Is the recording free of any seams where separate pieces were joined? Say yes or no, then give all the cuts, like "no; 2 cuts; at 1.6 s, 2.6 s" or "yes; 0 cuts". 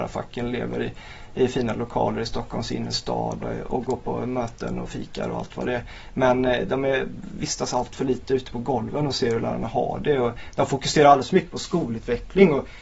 no; 1 cut; at 3.4 s